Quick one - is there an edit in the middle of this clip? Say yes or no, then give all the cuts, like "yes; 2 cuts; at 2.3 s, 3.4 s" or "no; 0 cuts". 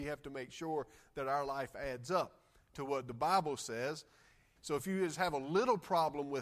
yes; 1 cut; at 4.6 s